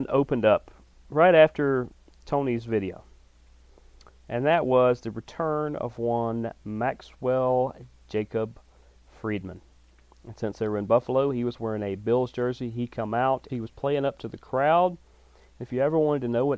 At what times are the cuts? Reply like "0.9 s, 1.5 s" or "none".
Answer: 13.5 s

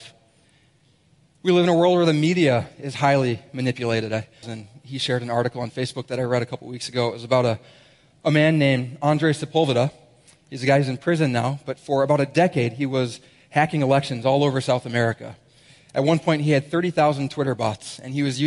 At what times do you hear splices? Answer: 4.4 s

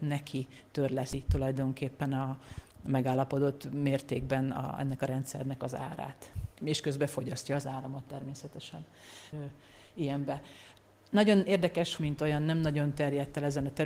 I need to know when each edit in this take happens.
6.6 s, 9.3 s, 12.0 s

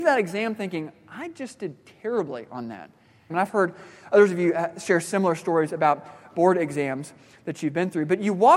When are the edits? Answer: 3.3 s

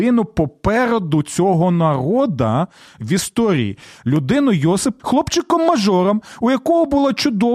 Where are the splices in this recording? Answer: 5.0 s

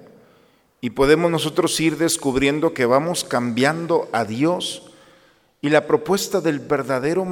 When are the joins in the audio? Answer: none

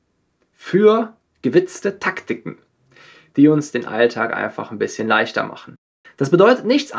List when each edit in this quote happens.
6.0 s

